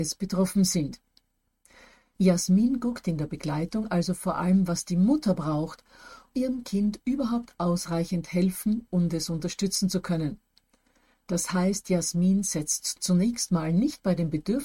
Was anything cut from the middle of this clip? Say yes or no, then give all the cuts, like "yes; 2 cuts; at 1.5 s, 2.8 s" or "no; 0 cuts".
yes; 1 cut; at 6.3 s